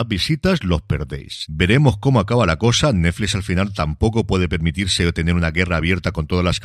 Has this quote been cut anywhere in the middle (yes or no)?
no